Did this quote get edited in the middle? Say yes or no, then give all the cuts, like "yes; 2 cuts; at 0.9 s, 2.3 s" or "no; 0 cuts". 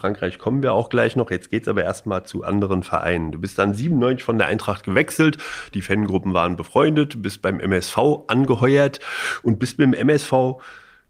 yes; 1 cut; at 5.7 s